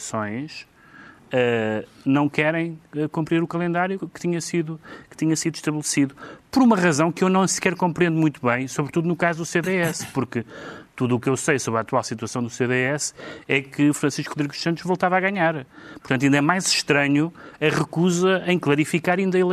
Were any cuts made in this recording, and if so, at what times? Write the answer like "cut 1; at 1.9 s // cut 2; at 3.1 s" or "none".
cut 1; at 4.0 s